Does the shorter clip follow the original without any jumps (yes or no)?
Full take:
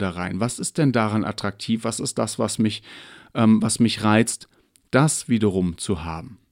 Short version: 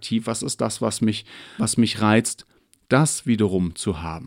no